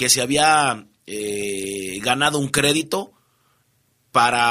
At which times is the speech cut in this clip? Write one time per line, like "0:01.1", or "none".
none